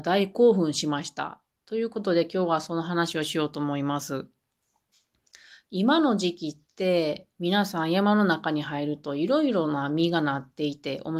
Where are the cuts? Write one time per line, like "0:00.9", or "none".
0:05.6